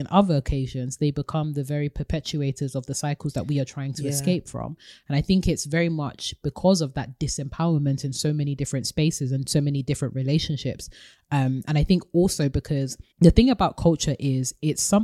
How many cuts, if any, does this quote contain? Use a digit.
1